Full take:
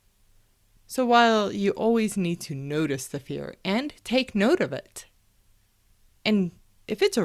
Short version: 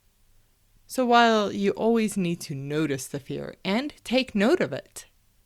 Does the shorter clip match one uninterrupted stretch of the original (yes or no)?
yes